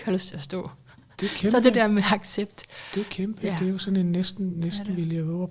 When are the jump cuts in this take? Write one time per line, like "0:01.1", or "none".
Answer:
none